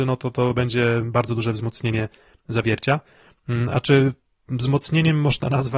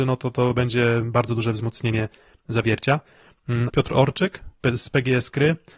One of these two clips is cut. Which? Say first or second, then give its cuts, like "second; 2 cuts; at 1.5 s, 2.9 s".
second; 1 cut; at 3.7 s